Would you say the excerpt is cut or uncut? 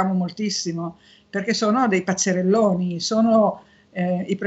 uncut